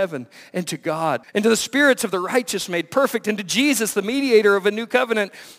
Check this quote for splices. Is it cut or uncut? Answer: cut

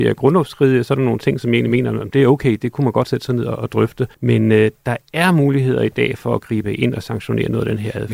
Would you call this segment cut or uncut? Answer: cut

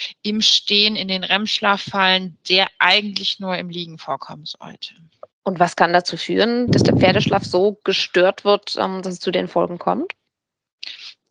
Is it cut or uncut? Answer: cut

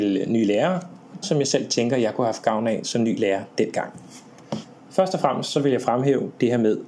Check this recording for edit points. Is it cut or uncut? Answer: cut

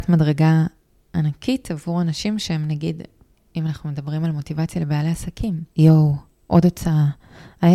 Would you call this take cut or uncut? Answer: cut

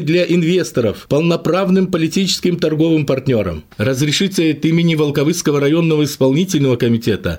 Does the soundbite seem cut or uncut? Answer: cut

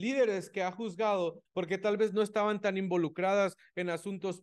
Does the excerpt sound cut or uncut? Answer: cut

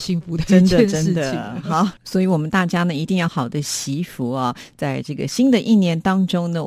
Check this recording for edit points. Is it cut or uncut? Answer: cut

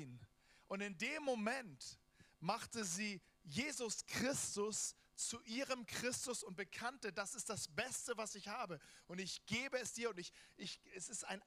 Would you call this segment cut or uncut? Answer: uncut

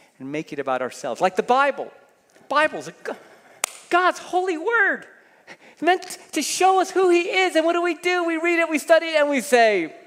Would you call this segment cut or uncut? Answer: uncut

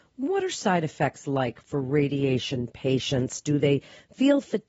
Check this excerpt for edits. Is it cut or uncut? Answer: uncut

